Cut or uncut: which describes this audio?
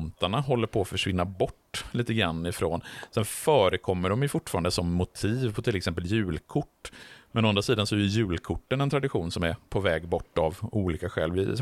uncut